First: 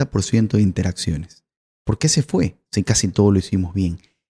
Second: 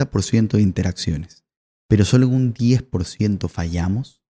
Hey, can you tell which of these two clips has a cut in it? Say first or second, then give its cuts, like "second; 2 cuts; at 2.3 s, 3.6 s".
first; 1 cut; at 1.8 s